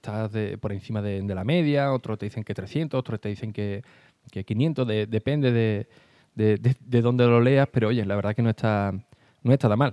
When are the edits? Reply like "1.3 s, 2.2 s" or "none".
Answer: none